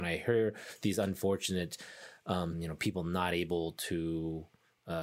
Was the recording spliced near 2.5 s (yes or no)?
yes